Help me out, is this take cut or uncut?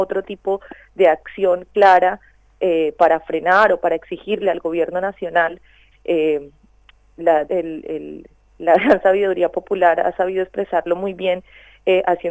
cut